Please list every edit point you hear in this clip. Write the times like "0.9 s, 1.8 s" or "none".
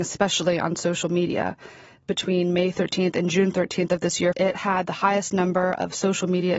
4.3 s